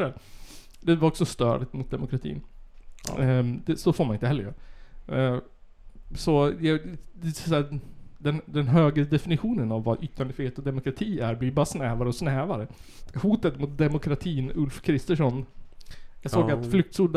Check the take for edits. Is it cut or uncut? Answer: uncut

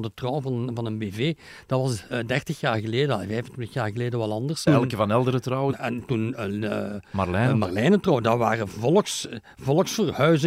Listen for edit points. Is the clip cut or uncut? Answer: cut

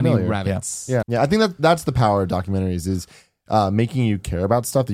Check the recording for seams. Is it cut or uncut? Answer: cut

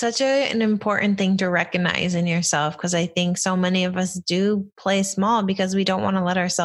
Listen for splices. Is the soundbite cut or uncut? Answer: uncut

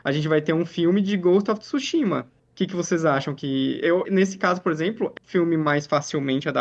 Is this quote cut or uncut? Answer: cut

